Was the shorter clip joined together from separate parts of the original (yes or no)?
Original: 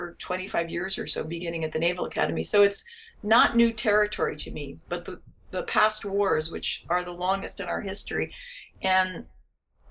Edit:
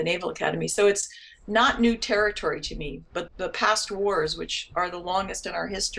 yes